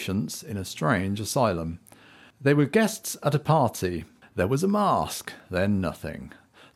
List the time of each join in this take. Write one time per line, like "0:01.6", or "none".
none